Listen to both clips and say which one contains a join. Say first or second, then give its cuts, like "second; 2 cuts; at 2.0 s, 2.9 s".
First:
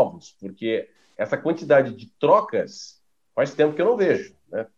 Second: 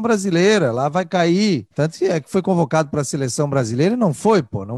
second; 1 cut; at 1.7 s